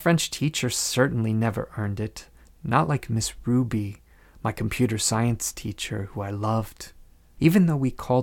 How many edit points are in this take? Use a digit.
0